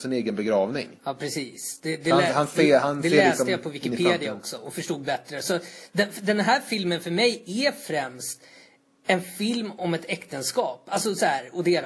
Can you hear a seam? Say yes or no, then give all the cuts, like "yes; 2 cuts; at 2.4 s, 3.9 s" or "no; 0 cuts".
no; 0 cuts